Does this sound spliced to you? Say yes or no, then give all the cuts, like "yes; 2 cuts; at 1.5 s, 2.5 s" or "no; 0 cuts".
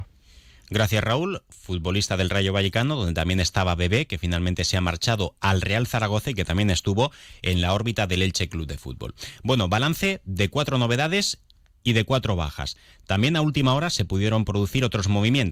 no; 0 cuts